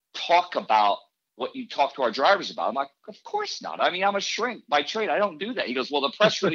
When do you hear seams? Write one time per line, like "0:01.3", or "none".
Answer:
none